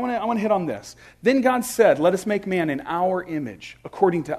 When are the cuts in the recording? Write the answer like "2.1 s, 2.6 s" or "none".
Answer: none